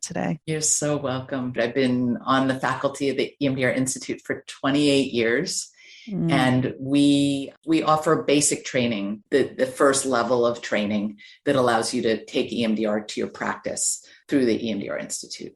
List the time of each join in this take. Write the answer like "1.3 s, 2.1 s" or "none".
1.6 s